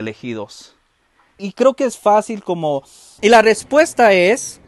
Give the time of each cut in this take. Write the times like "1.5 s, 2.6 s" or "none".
1.4 s, 3.2 s